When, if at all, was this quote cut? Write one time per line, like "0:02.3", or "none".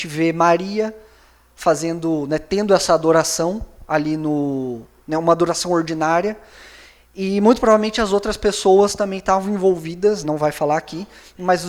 0:10.2